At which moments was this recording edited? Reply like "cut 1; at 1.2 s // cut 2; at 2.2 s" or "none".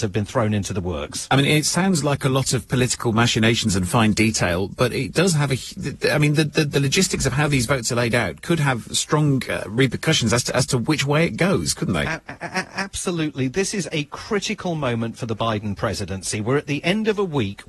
none